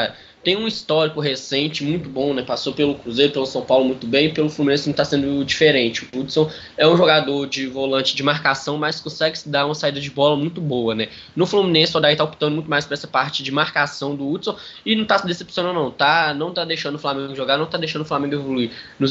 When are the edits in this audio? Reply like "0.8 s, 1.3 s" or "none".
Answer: none